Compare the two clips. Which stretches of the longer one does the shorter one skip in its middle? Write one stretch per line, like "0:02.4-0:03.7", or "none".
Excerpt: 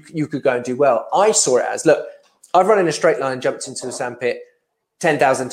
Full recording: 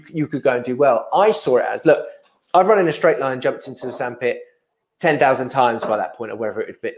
none